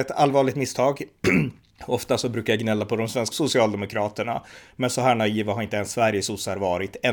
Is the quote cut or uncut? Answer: cut